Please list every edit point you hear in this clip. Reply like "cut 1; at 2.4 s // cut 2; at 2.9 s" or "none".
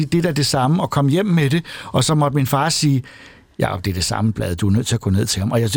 none